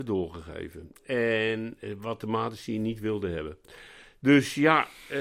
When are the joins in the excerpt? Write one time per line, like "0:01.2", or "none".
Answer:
none